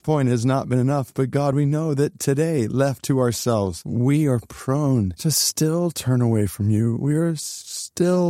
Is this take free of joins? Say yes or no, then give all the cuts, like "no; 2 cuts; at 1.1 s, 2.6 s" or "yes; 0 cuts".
yes; 0 cuts